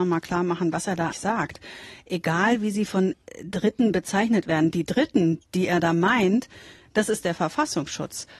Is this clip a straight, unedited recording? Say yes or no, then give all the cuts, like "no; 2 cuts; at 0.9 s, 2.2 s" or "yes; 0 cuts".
no; 1 cut; at 1.1 s